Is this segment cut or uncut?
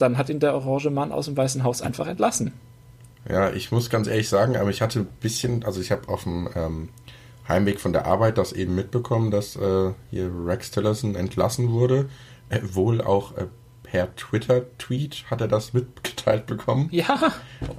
uncut